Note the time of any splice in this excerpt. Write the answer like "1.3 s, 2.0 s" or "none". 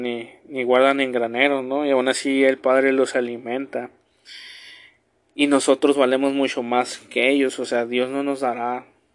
none